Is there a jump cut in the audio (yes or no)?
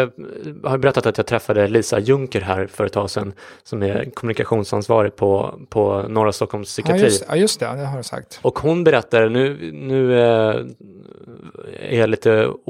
no